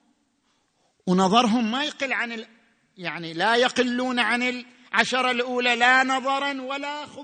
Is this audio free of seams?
yes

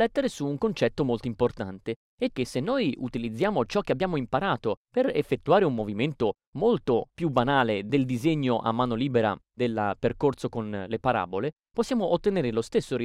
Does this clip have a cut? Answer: yes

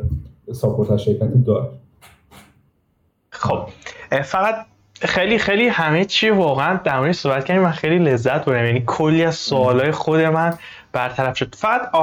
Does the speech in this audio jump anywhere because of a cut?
no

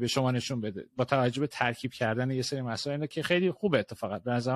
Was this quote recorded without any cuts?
yes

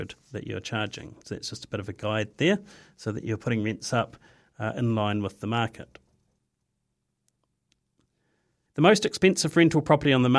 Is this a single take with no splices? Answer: no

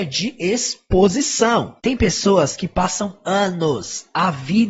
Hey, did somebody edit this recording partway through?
no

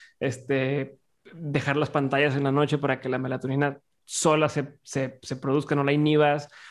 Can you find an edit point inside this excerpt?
no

